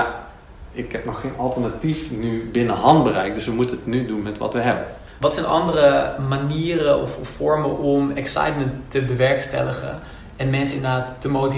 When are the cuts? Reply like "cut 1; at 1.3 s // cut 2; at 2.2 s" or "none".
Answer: cut 1; at 5.2 s